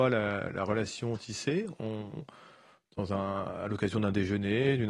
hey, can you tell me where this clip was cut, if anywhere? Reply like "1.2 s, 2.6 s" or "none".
none